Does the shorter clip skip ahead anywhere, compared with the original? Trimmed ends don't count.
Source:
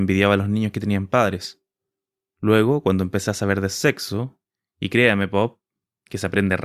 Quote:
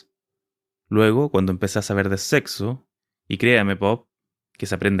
no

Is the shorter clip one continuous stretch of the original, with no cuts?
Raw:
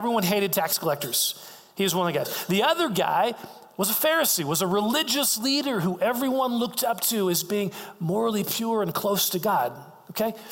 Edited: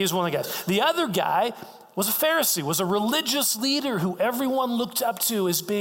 yes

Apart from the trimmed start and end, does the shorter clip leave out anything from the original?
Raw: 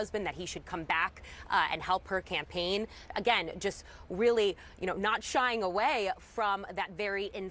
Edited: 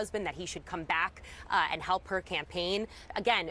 no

